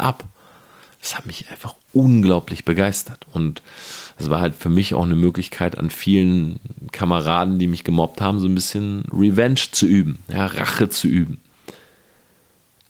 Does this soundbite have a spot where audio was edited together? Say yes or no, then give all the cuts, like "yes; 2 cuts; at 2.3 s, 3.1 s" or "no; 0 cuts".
no; 0 cuts